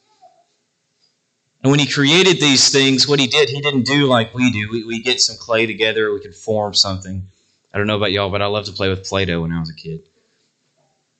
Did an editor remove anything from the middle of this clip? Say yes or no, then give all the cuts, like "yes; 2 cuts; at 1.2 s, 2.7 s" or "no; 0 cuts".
no; 0 cuts